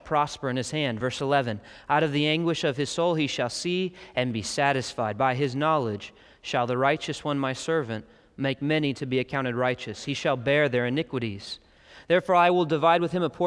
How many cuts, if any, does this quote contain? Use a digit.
0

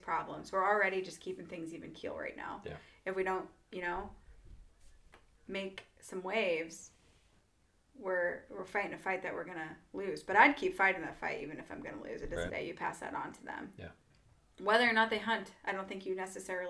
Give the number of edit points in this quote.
1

